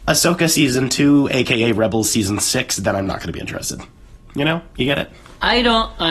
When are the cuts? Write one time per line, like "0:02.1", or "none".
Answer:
0:04.3